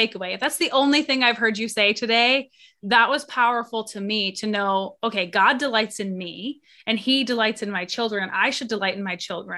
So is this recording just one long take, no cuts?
yes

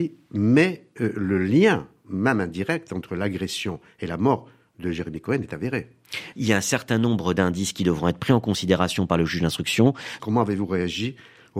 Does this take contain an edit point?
yes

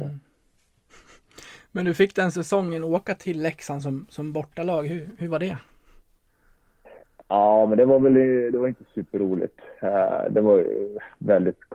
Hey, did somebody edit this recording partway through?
no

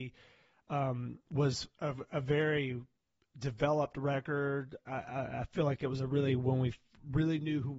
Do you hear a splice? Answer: no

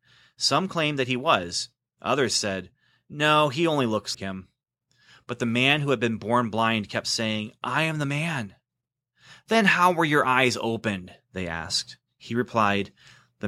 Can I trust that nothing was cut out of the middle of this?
no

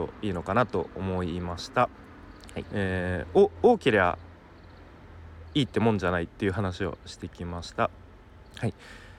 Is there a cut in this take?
yes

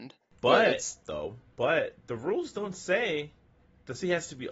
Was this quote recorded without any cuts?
no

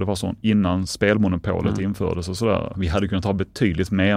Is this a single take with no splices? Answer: no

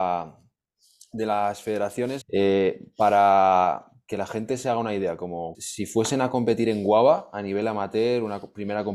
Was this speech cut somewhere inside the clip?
yes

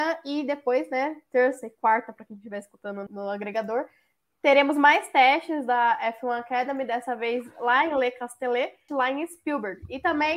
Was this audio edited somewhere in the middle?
yes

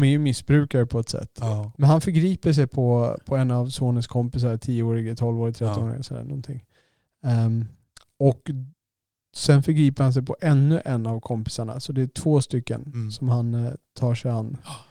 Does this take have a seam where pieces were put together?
yes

